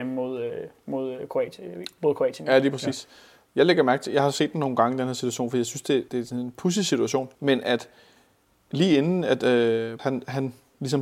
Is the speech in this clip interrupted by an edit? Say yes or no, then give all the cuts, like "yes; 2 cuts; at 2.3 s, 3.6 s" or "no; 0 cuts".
yes; 3 cuts; at 6.1 s, 7.3 s, 10.0 s